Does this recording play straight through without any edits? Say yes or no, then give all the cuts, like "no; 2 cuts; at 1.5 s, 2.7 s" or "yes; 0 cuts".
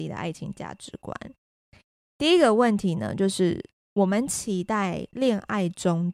yes; 0 cuts